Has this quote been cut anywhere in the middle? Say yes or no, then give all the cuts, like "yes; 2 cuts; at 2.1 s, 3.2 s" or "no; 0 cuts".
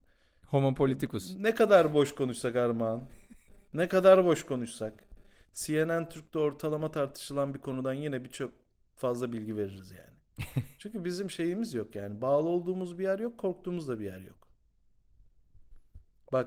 no; 0 cuts